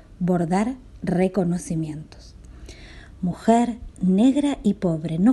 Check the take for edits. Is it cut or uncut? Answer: uncut